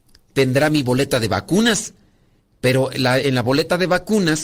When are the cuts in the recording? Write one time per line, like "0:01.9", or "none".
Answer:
none